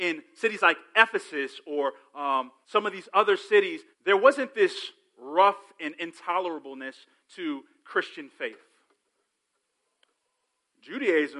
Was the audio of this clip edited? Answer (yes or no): yes